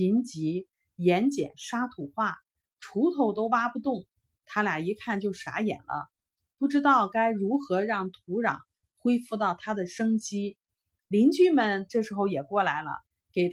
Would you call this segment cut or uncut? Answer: uncut